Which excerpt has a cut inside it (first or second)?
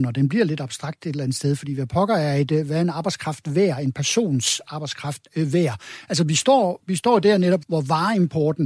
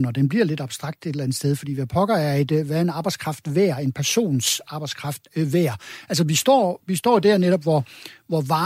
first